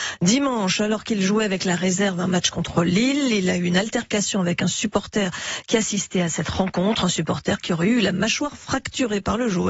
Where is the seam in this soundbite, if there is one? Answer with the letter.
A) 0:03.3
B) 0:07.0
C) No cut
C